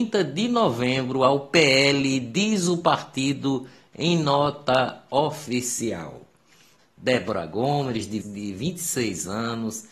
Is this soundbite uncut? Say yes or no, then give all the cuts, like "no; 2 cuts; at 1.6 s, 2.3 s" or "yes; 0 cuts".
no; 2 cuts; at 6.8 s, 8.2 s